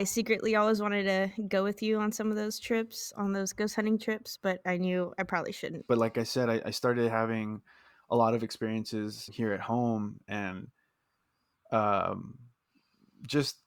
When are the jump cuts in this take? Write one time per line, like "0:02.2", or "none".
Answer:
0:05.9
0:09.3